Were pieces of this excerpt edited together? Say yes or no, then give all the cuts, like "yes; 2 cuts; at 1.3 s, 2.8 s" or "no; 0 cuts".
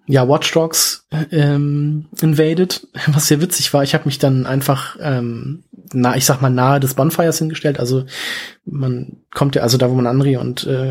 no; 0 cuts